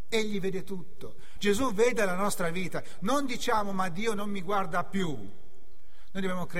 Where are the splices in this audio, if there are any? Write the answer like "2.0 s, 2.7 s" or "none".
1.4 s